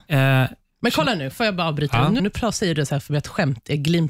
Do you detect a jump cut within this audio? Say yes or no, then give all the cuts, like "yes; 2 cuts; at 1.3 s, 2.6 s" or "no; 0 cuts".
yes; 1 cut; at 2.2 s